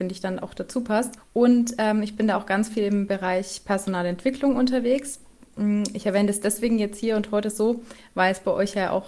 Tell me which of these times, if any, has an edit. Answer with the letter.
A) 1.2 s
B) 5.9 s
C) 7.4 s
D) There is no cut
A